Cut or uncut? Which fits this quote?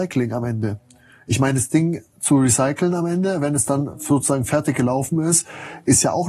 uncut